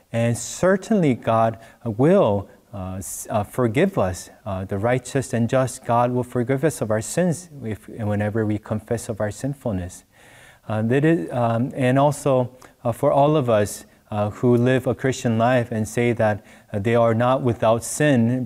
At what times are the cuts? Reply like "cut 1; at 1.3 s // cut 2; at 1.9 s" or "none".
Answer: none